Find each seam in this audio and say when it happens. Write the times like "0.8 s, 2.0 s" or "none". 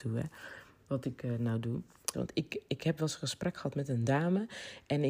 2.1 s